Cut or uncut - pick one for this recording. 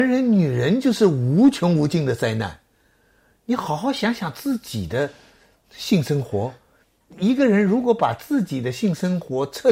uncut